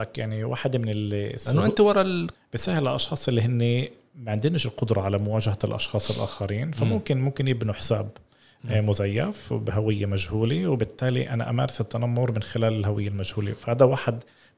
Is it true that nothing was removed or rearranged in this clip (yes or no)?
no